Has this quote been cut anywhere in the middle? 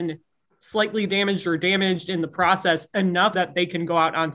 yes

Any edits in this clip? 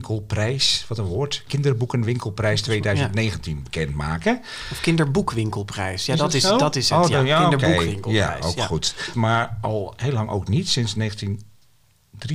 yes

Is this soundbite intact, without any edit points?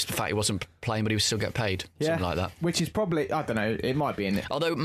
yes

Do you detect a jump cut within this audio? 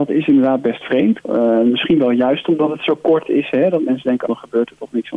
yes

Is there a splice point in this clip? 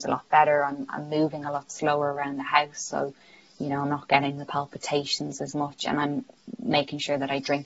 no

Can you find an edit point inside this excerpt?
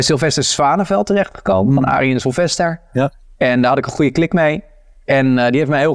no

